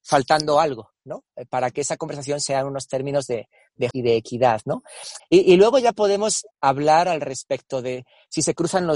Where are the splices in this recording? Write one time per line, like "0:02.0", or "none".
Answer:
0:03.9
0:05.2
0:06.5